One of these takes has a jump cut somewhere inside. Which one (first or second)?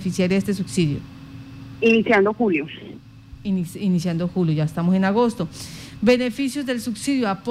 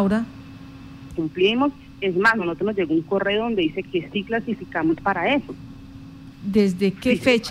second